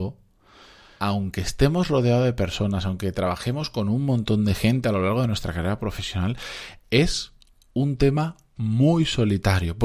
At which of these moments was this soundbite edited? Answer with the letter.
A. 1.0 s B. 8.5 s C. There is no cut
A